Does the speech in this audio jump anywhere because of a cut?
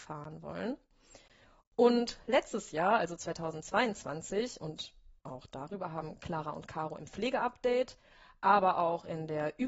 no; 0 cuts

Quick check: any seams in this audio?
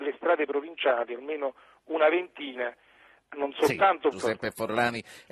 yes; 1 cut; at 4.1 s

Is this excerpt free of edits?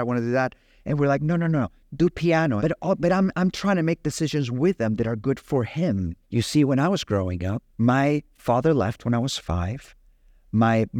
no; 3 cuts; at 2.6 s, 6.2 s, 7.7 s

